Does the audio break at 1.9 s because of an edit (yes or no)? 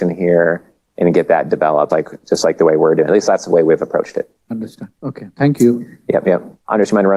yes